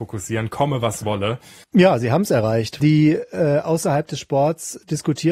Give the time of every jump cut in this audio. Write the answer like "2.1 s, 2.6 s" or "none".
1.6 s, 2.8 s